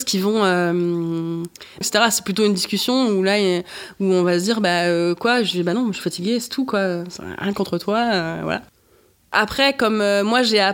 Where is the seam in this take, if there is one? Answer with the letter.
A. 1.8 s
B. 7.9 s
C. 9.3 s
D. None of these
A